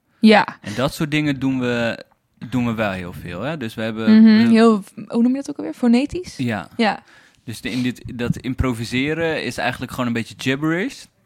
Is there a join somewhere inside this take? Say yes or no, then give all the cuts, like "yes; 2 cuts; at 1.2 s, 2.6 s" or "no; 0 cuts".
no; 0 cuts